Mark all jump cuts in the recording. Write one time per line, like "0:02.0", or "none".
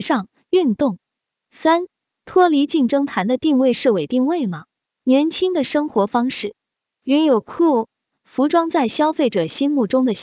0:04.9